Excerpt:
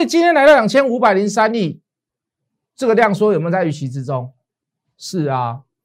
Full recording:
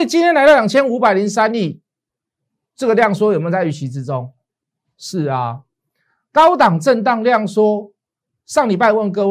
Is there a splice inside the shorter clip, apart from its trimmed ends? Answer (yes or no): no